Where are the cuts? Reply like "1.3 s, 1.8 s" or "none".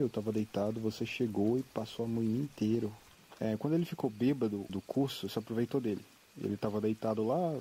3.2 s, 4.7 s

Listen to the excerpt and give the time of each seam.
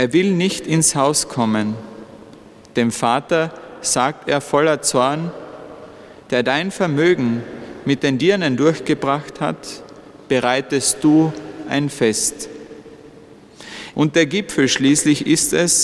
6.3 s, 13.9 s

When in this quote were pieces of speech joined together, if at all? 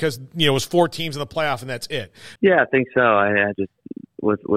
2.4 s, 3.5 s

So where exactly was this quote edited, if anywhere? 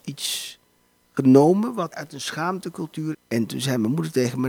1.9 s, 3.1 s

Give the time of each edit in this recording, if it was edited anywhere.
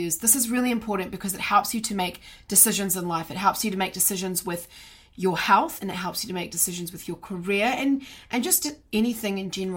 5.8 s

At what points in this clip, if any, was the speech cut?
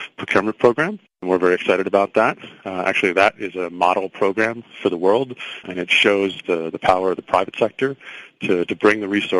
none

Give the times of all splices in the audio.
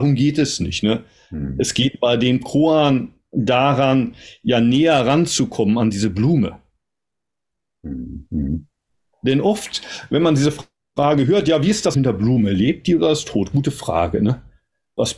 9.1 s, 11.9 s

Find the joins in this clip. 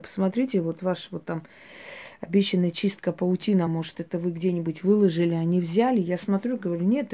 none

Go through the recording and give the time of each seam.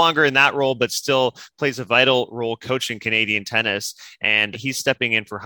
4.5 s

